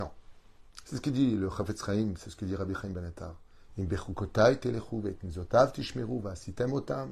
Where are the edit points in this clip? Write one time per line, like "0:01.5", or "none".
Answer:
0:03.7